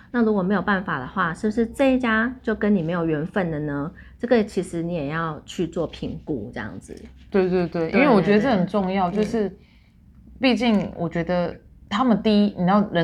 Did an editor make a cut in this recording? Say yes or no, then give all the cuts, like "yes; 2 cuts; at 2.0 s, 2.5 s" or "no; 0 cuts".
no; 0 cuts